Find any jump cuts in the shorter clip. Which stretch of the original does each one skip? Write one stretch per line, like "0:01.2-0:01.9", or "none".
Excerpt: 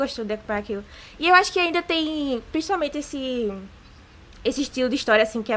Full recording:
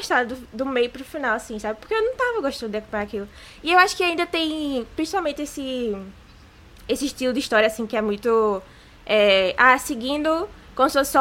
none